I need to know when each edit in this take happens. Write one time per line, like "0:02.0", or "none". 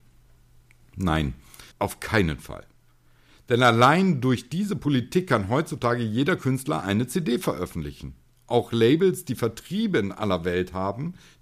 0:01.7

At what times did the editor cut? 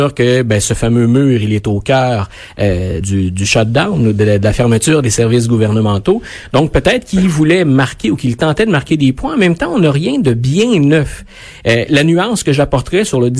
0:03.0

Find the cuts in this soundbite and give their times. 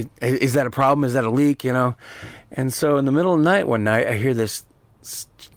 none

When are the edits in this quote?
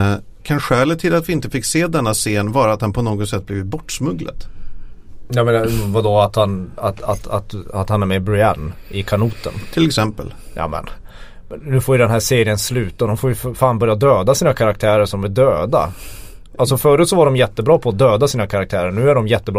none

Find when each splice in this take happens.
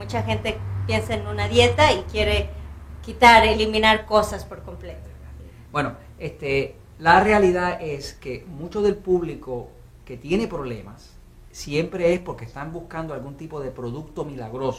none

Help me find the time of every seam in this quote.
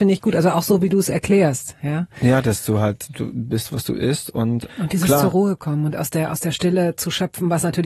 0:04.7

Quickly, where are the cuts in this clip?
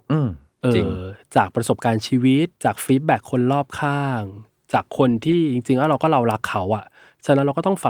0:02.5

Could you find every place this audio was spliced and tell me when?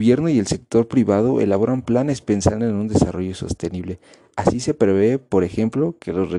none

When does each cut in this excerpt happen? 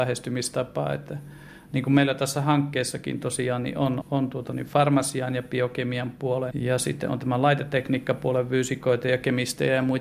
0:04.0
0:06.5

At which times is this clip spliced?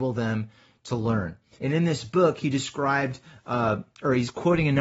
0:01.6

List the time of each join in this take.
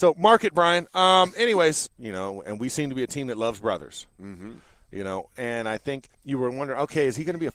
0:01.9
0:06.1

